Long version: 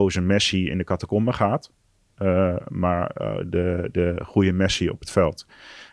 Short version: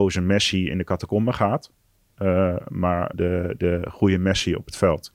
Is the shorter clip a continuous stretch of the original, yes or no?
no